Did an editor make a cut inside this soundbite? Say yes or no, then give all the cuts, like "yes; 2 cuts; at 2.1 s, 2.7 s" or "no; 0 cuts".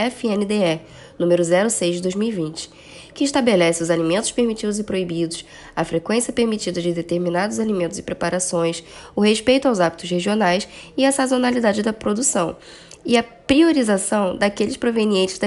no; 0 cuts